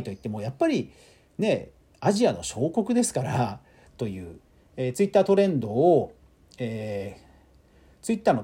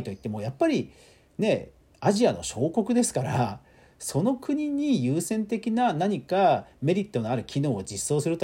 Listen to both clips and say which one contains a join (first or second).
first